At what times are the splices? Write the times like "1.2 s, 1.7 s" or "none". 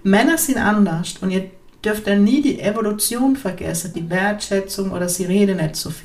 3.9 s